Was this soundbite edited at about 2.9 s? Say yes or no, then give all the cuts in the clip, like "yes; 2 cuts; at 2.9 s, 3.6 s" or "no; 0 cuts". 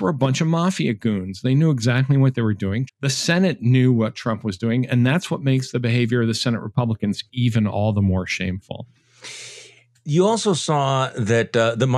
yes; 1 cut; at 2.9 s